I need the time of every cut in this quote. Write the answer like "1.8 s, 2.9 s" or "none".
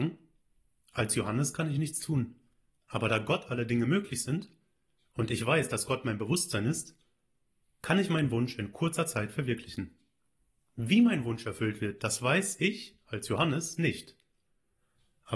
none